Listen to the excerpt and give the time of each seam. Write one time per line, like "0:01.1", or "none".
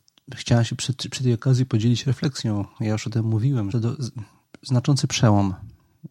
0:03.7